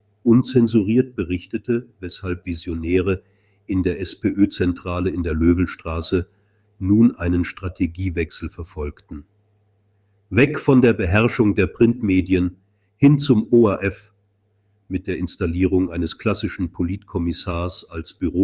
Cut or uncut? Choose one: uncut